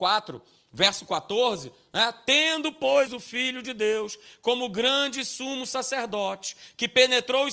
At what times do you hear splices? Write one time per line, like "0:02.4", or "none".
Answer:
0:03.1